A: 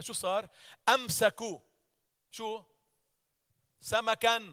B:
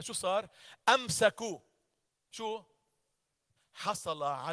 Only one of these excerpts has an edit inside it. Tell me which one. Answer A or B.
B